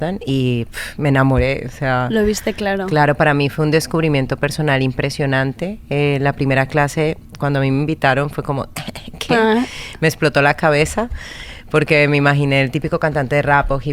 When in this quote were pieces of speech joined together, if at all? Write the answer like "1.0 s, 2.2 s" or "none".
none